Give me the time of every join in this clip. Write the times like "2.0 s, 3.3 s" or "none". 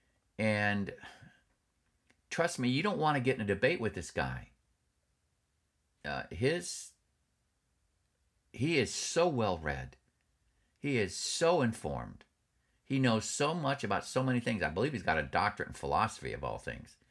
none